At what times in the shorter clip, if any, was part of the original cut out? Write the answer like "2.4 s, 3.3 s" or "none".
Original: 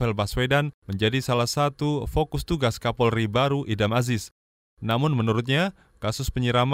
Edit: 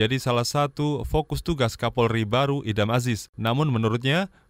3.3 s